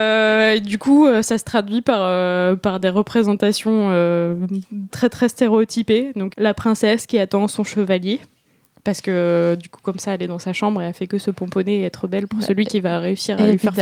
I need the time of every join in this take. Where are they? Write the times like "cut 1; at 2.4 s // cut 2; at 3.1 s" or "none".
cut 1; at 4.9 s // cut 2; at 6.3 s